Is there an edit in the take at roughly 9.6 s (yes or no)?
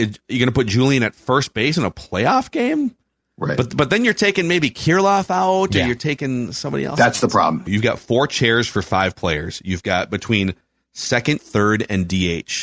no